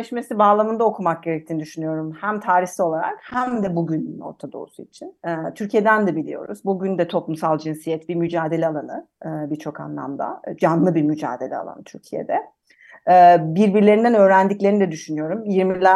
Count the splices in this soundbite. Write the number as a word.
one